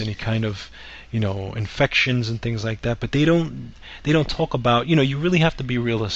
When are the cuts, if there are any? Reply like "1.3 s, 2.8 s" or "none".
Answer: none